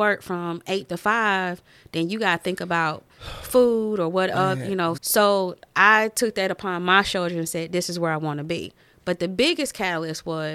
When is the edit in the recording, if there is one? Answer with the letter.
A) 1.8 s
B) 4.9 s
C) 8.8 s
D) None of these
B